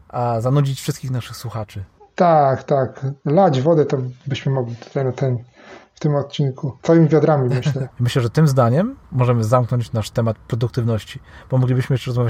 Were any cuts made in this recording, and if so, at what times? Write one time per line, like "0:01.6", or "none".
0:07.9
0:09.0